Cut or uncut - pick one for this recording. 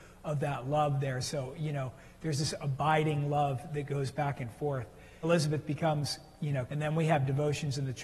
cut